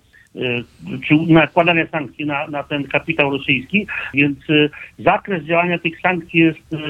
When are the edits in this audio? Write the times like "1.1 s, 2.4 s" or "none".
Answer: 4.1 s, 6.0 s